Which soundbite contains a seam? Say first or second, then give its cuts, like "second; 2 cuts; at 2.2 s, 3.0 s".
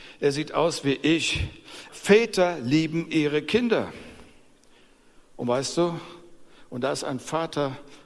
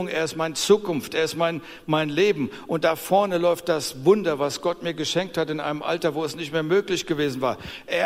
first; 1 cut; at 1.9 s